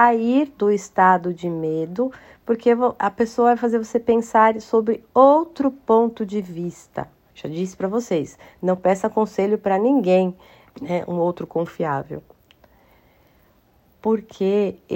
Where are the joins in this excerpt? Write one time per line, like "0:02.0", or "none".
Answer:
0:07.3
0:10.7